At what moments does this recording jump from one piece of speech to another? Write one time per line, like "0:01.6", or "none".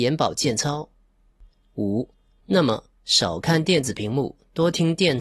0:02.4